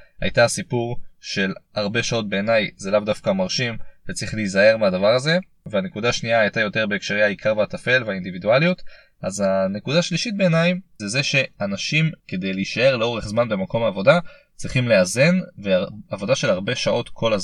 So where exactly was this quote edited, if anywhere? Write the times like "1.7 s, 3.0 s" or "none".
11.0 s, 12.2 s